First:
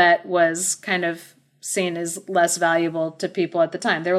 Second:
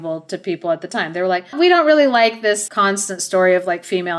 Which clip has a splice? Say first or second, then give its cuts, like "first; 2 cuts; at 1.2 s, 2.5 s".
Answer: second; 2 cuts; at 1.5 s, 2.7 s